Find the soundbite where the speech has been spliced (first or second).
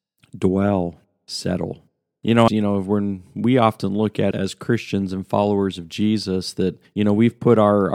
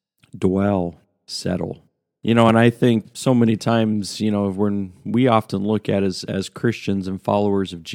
first